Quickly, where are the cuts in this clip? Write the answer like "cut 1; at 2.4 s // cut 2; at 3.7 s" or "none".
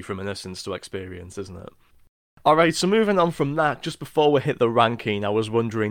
none

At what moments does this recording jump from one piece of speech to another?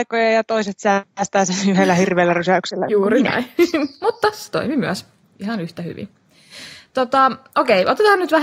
none

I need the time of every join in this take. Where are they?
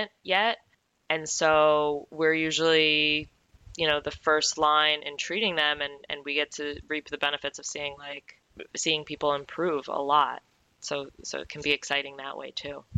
cut 1; at 5.0 s

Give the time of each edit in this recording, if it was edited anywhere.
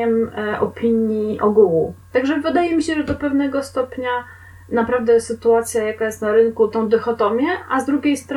cut 1; at 2.0 s // cut 2; at 6.7 s

